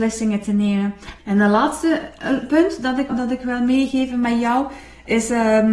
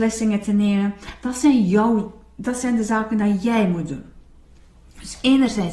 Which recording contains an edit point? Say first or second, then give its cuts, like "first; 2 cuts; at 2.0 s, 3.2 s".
first; 2 cuts; at 1.2 s, 3.1 s